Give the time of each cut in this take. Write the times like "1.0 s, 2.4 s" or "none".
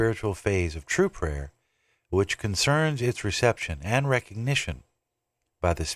none